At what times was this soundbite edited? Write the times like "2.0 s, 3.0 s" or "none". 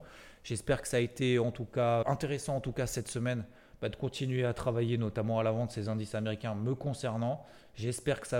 2.0 s